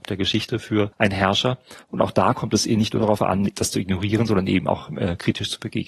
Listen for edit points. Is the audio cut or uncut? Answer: cut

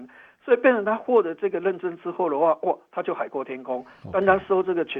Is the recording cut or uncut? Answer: uncut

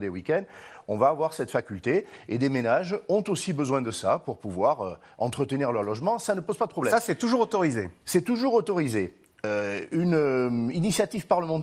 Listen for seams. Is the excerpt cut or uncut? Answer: uncut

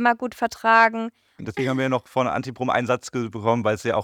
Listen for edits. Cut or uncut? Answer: cut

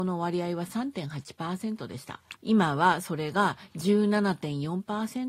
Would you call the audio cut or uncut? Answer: cut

